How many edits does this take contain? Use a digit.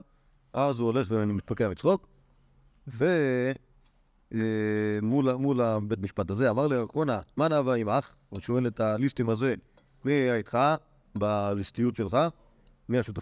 0